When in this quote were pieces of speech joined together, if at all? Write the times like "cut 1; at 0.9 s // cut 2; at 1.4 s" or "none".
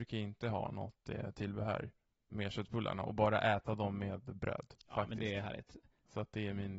cut 1; at 4.8 s